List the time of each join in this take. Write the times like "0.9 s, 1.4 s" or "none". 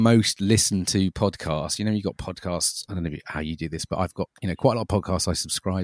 none